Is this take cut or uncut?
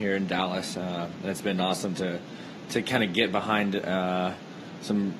uncut